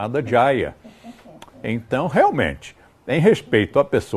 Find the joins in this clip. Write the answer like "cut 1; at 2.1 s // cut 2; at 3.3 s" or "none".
none